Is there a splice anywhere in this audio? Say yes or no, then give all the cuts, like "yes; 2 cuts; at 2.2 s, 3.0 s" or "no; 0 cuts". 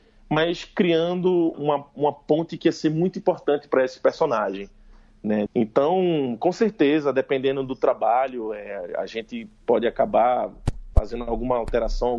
yes; 2 cuts; at 1.5 s, 5.5 s